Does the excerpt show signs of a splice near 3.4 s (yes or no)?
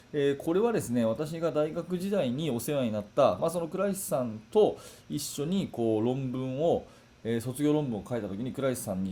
yes